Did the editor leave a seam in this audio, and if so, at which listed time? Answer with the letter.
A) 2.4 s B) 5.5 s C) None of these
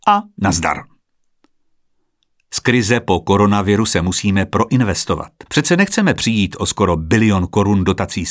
B